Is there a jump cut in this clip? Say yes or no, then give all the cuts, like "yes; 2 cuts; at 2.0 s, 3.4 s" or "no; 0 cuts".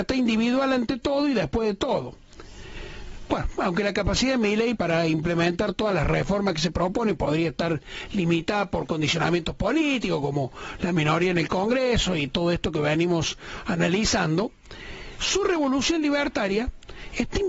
yes; 1 cut; at 4.7 s